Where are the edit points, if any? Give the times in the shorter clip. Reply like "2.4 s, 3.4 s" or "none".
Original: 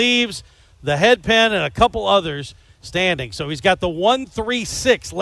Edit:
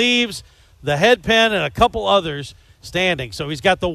none